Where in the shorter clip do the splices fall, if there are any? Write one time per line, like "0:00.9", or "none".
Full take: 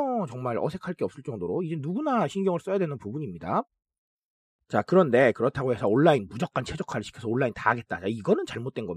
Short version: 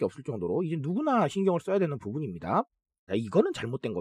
0:03.1